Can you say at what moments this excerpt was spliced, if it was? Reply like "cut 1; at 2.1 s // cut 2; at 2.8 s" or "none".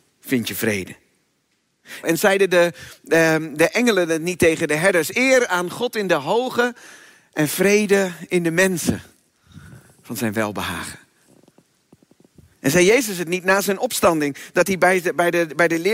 cut 1; at 2.0 s